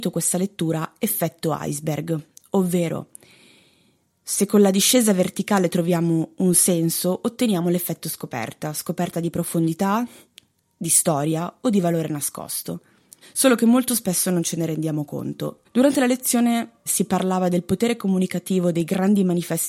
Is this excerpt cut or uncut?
cut